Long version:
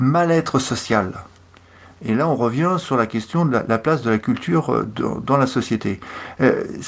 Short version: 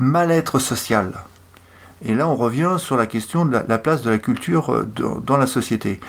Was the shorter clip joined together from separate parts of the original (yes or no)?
no